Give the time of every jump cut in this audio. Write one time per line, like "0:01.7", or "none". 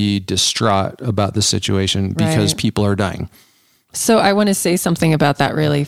0:03.9